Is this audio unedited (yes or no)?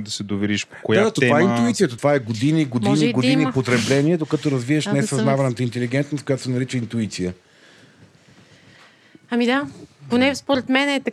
no